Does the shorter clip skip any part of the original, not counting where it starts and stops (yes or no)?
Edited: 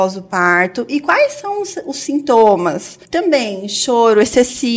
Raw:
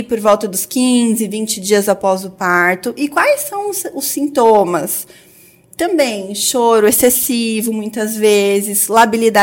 yes